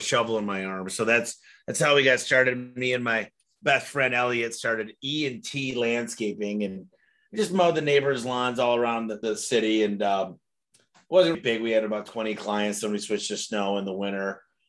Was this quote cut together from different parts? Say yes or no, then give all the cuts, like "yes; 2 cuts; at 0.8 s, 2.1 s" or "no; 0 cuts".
yes; 2 cuts; at 9.2 s, 11.3 s